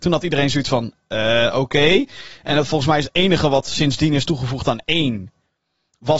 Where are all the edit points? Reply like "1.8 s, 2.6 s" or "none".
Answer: none